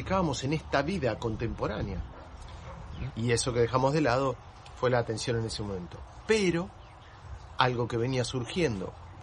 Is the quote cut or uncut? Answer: cut